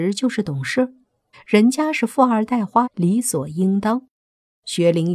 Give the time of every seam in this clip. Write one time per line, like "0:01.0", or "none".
0:01.3
0:02.8

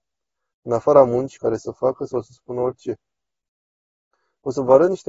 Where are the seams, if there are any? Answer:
0:01.4

